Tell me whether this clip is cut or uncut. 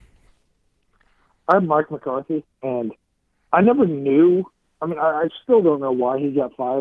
cut